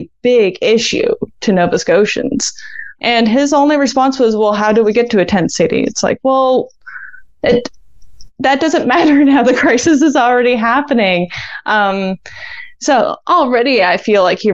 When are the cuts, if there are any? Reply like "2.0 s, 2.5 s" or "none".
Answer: 3.0 s